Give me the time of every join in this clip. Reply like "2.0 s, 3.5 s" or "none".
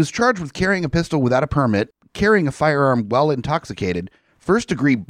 none